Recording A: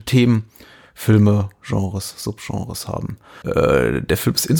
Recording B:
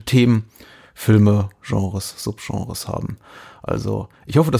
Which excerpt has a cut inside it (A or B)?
A